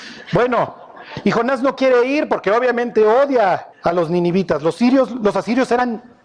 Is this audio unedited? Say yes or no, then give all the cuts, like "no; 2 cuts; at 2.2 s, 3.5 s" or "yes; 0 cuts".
no; 1 cut; at 3.7 s